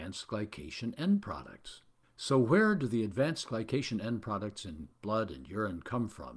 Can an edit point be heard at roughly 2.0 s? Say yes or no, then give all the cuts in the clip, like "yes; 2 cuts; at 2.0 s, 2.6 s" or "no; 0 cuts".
yes; 1 cut; at 2.0 s